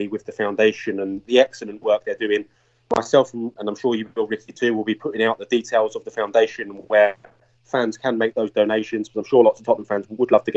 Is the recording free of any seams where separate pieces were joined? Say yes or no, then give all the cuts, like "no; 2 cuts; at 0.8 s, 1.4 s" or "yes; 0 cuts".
no; 1 cut; at 8.3 s